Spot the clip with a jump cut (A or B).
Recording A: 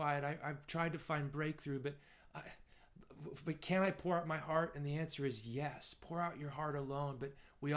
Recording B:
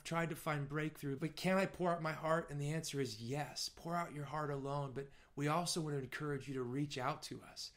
B